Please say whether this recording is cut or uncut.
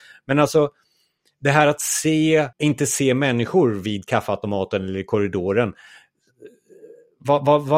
cut